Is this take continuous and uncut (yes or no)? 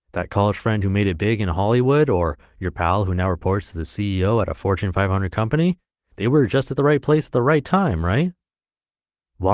yes